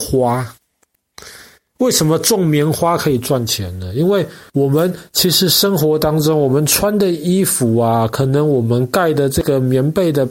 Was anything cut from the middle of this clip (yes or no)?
no